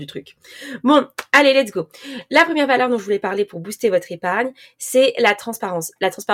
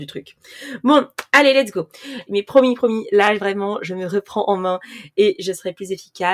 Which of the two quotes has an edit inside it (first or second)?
second